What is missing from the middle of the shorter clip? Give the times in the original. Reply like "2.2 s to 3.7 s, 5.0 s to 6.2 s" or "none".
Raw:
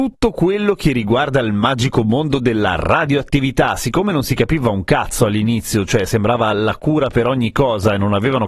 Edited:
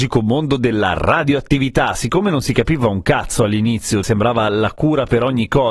5.9 s to 6.1 s